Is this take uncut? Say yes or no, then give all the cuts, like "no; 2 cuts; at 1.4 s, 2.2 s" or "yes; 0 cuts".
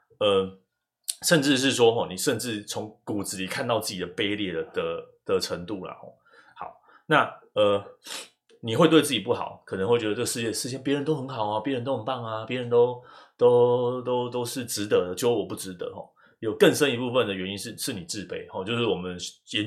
yes; 0 cuts